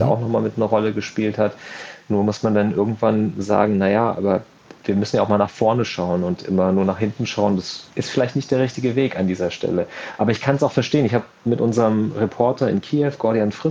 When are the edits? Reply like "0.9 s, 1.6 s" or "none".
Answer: none